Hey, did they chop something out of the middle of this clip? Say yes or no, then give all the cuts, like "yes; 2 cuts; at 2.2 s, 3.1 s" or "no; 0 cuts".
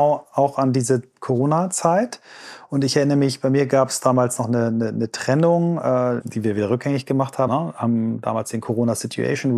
yes; 2 cuts; at 6.2 s, 7.5 s